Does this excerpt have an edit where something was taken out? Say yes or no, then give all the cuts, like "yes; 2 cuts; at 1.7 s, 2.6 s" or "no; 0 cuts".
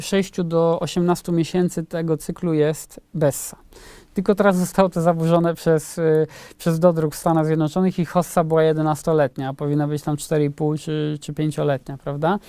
no; 0 cuts